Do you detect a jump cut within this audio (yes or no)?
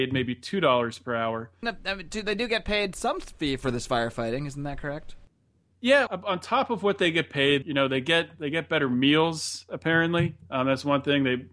yes